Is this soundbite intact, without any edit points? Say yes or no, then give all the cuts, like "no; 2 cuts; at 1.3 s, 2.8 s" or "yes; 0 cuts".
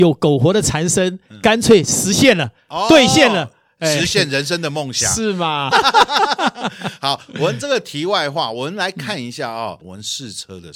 no; 2 cuts; at 5.7 s, 9.8 s